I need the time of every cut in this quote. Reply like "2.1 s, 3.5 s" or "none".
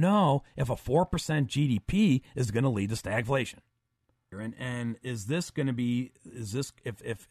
4.3 s